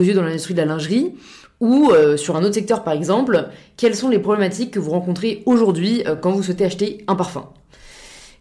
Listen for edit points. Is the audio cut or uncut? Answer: uncut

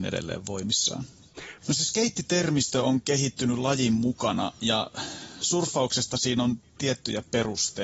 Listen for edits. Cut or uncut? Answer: cut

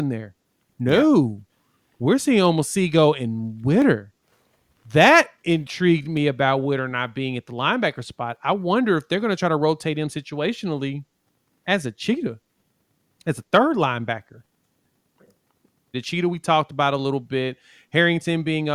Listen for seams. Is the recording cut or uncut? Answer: cut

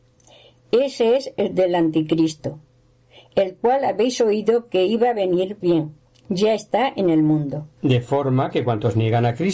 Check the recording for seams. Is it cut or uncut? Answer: cut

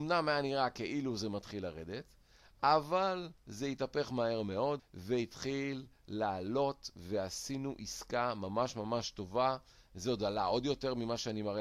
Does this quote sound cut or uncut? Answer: cut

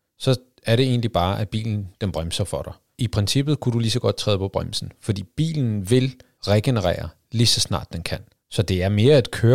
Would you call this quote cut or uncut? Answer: uncut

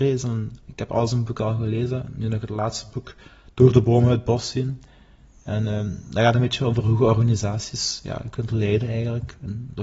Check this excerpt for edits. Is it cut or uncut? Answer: uncut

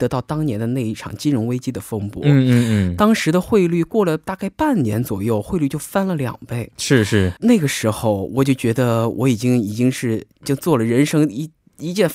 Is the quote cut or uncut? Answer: cut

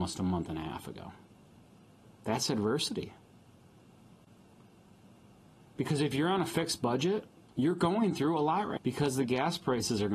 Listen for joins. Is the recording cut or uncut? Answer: cut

